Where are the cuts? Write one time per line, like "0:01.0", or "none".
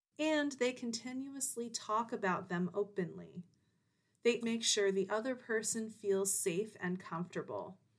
0:04.4